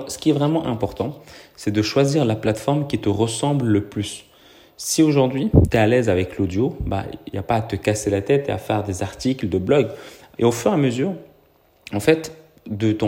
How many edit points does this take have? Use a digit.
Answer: 1